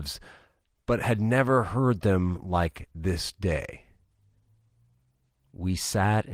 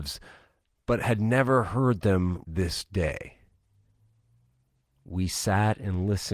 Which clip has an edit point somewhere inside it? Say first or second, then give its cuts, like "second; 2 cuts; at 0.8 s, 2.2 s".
second; 1 cut; at 2.4 s